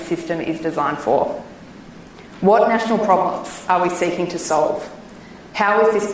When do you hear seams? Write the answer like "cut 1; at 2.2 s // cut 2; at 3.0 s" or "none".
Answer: none